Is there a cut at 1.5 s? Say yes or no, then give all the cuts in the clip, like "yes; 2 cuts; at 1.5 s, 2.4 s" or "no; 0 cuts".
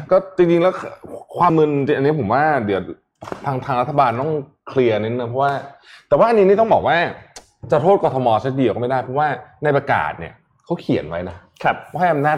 yes; 1 cut; at 1.5 s